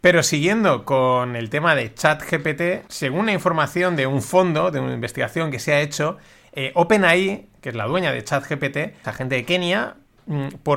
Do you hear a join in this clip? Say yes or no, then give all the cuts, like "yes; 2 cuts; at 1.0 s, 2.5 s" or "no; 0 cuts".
yes; 2 cuts; at 2.9 s, 9.0 s